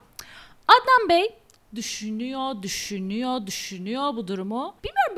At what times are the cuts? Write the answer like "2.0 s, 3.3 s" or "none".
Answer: none